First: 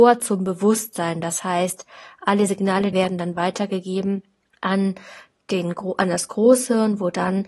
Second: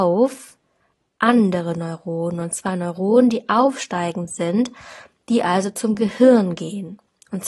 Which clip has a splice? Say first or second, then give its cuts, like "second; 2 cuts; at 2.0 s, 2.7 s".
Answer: first; 1 cut; at 2.9 s